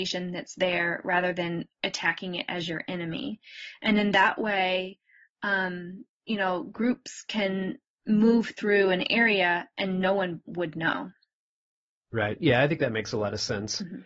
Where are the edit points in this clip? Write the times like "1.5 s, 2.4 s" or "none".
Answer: none